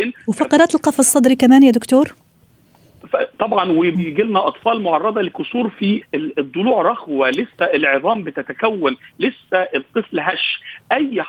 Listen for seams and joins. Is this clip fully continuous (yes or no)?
no